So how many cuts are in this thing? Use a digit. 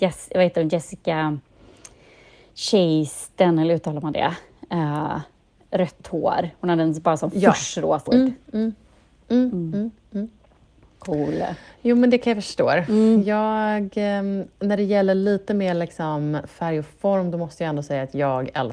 1